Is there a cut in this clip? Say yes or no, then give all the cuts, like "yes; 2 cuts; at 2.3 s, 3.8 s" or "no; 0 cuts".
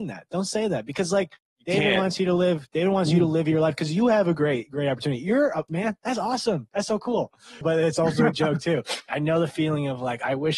yes; 3 cuts; at 5.7 s, 7.6 s, 9.1 s